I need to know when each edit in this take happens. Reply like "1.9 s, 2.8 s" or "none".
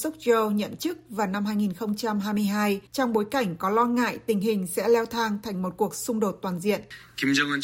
2.9 s